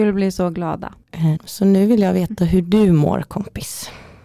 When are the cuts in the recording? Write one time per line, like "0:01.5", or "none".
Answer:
0:01.4